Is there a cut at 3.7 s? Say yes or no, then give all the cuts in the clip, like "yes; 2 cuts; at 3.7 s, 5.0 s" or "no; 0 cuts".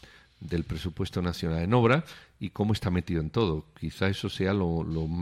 no; 0 cuts